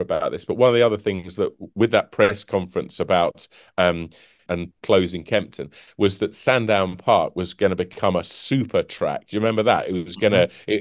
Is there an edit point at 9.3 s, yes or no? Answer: no